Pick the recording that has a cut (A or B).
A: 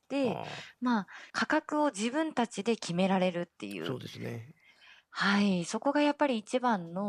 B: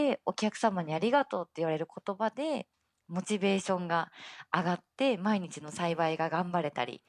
A